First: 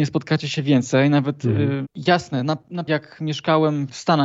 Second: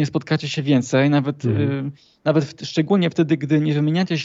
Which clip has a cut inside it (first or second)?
first